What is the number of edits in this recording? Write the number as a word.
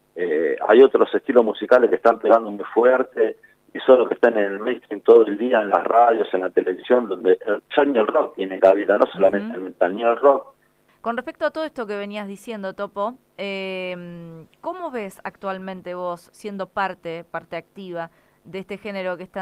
one